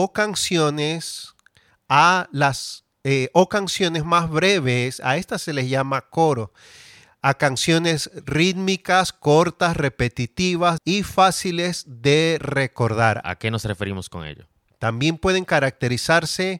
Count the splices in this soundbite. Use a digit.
3